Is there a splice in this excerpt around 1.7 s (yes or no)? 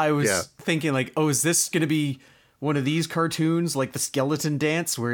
yes